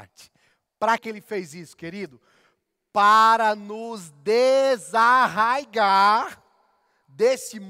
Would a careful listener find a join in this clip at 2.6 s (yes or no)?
no